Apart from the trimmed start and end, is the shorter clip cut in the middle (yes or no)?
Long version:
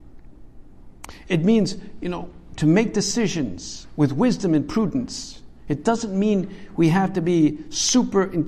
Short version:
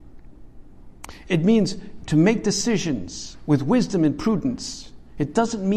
yes